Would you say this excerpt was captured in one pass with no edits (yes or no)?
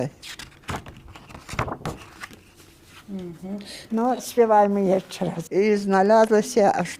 no